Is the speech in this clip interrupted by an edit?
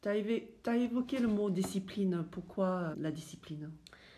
yes; 1 cut; at 2.9 s

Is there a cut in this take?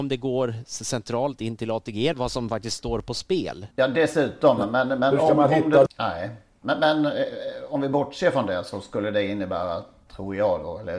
yes; 3 cuts; at 2.1 s, 3.7 s, 5.9 s

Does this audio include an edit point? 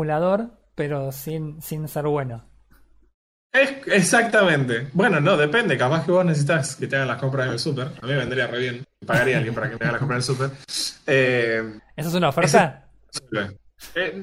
no; 0 cuts

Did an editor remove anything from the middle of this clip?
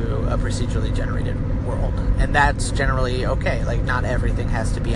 no; 0 cuts

